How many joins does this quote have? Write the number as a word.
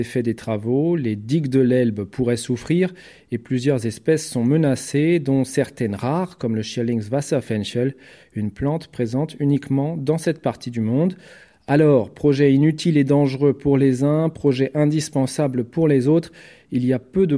zero